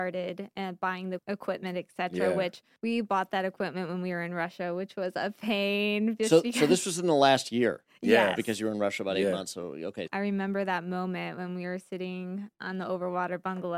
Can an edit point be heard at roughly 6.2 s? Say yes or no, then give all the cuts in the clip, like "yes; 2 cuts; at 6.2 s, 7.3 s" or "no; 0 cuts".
no; 1 cut; at 10.1 s